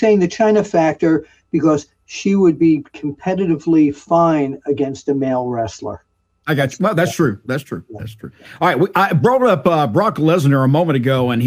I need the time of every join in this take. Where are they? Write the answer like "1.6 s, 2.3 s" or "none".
none

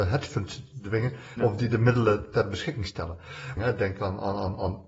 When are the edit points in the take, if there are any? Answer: 1.4 s, 3.6 s

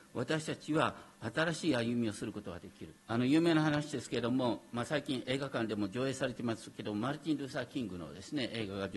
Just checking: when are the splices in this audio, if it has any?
3.0 s

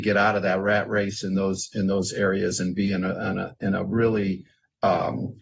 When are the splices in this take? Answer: none

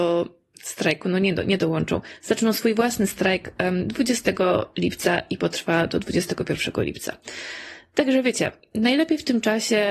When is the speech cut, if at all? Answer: none

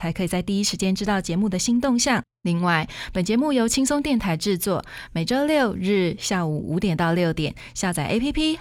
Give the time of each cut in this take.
none

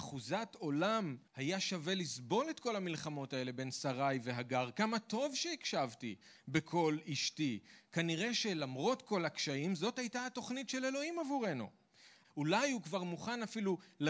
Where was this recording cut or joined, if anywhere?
1.3 s, 12.2 s

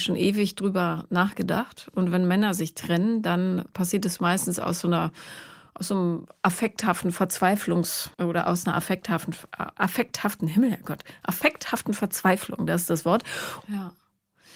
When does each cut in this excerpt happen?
8.1 s, 13.6 s

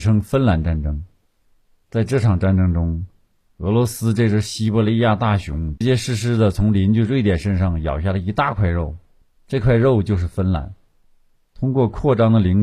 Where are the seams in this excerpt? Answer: 5.8 s

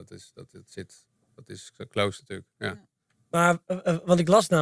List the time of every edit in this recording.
3.1 s

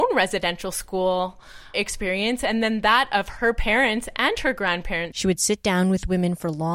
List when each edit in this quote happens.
1.7 s, 5.1 s

